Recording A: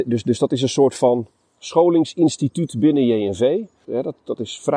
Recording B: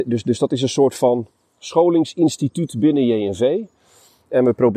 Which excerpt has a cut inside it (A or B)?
A